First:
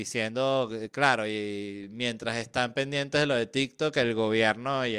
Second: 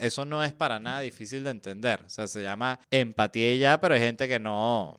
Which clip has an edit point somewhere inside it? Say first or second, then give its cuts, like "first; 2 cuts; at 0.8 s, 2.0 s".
second; 1 cut; at 2.8 s